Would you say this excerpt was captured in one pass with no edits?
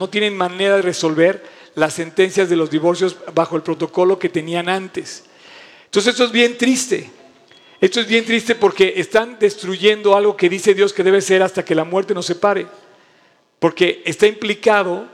yes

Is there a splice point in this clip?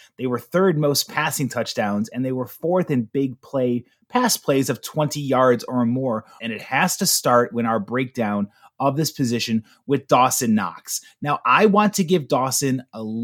yes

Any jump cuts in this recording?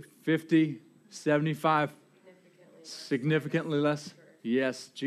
no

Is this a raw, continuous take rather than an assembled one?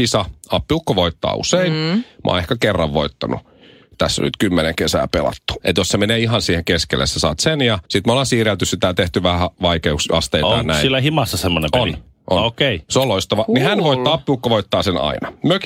no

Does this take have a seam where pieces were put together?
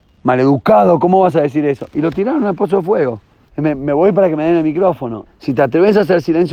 yes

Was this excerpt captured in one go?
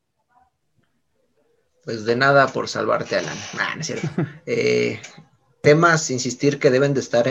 yes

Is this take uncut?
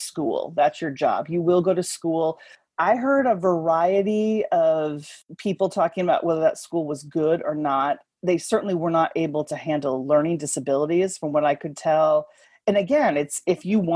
yes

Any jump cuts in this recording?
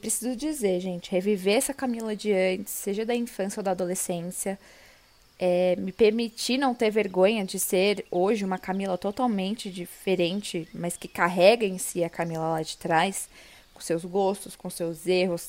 no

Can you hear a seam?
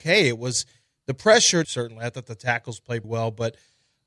yes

